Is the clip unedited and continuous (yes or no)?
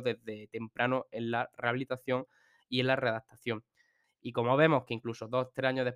no